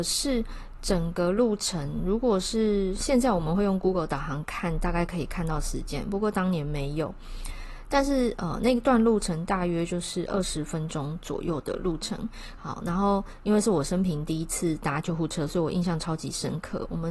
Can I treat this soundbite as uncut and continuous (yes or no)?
no